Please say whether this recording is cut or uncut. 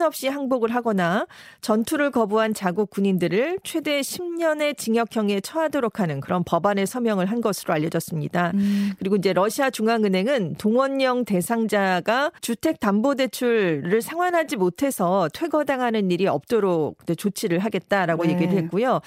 cut